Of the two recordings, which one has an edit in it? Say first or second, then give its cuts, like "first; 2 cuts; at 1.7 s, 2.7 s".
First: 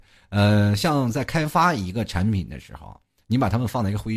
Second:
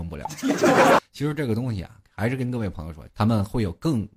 second; 2 cuts; at 1.0 s, 3.1 s